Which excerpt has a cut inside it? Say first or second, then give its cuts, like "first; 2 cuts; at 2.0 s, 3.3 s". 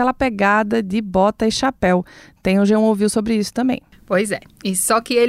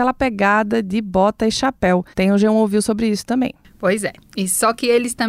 second; 1 cut; at 2.1 s